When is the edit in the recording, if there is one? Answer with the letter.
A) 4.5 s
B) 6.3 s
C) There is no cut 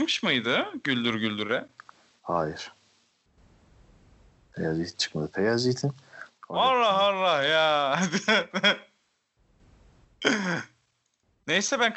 B